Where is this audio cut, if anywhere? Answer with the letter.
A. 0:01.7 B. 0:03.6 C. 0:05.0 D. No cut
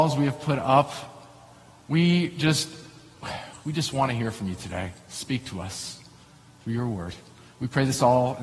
D